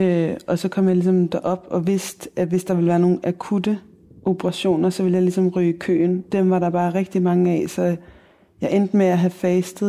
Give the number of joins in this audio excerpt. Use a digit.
0